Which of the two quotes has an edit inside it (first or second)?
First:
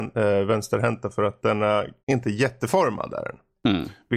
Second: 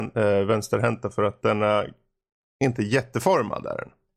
first